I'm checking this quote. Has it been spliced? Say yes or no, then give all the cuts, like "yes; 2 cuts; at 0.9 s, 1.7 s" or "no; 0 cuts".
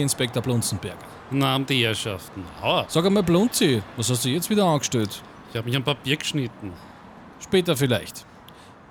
yes; 2 cuts; at 2.9 s, 7.3 s